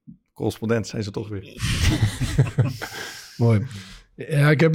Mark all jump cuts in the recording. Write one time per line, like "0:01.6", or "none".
none